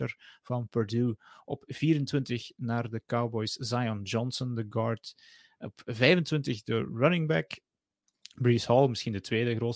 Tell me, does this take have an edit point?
no; 0 cuts

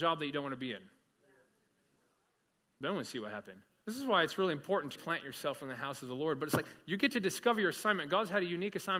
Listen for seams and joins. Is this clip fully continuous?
no; 2 cuts; at 3.8 s, 5.0 s

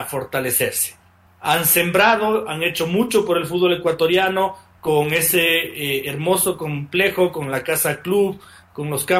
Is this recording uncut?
no; 1 cut; at 1.3 s

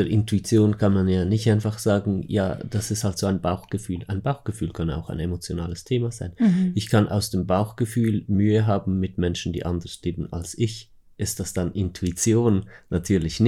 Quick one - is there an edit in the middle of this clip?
no; 0 cuts

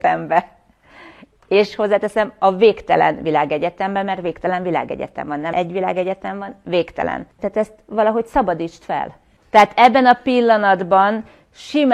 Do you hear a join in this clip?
yes; 1 cut; at 7.4 s

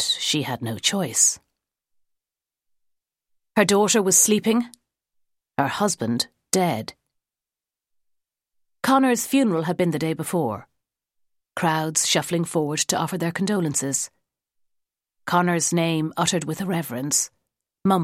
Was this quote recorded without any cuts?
yes; 0 cuts

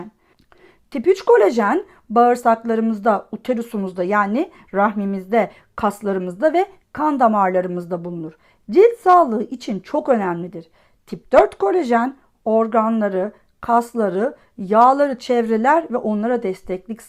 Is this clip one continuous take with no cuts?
yes; 0 cuts

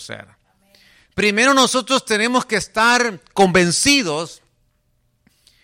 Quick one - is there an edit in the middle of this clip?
no; 0 cuts

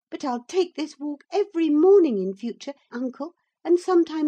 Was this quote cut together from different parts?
yes; 1 cut; at 2.9 s

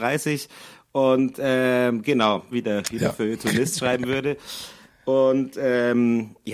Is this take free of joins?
no; 1 cut; at 2.5 s

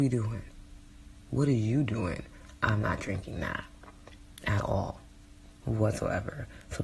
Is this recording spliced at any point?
yes; 1 cut; at 5.6 s

